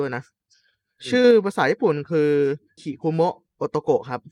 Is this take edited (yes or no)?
yes